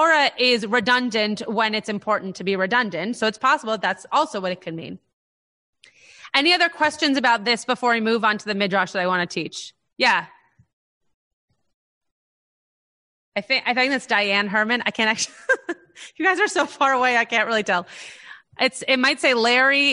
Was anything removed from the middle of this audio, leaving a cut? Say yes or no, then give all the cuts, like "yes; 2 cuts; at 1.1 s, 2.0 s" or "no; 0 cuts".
no; 0 cuts